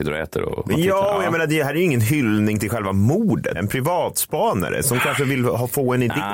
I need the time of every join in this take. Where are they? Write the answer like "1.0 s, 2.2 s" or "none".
3.5 s

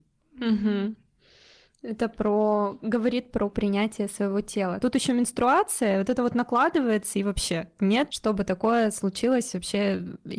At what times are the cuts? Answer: 4.8 s, 8.1 s

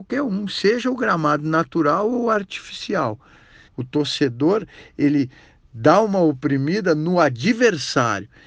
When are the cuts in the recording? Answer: 3.7 s

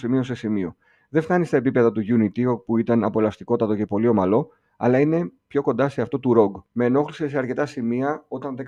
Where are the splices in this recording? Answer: 6.7 s

